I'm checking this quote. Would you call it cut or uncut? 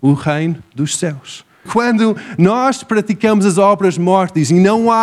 cut